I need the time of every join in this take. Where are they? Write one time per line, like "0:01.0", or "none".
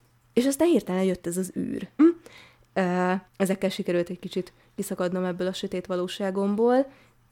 0:02.0
0:03.3